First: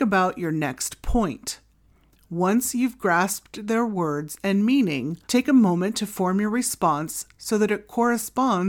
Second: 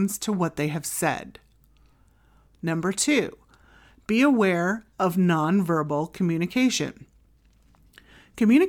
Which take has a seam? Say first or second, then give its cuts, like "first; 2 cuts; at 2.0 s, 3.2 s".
first; 1 cut; at 5.2 s